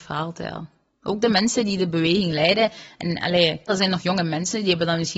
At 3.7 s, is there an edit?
yes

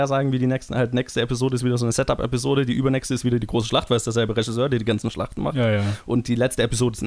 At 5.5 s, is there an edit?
no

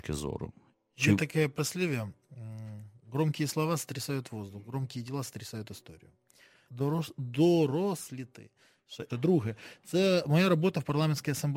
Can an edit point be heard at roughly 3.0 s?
no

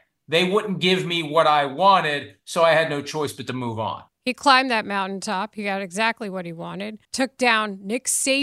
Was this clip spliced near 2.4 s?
no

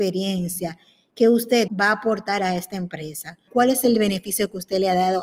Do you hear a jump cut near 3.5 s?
yes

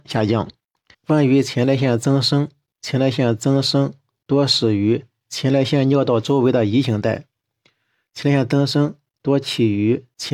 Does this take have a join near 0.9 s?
yes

